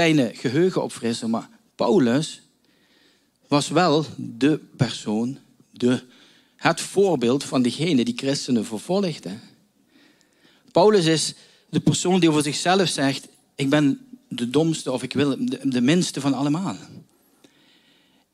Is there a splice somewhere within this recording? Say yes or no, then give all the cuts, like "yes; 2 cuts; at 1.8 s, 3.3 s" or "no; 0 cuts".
no; 0 cuts